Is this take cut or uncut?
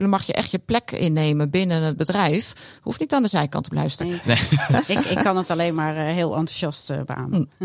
cut